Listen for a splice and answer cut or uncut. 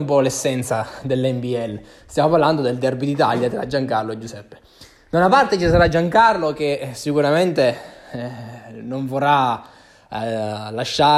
uncut